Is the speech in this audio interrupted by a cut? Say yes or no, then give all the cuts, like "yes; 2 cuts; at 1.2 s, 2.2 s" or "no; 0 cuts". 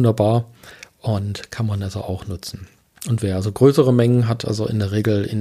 no; 0 cuts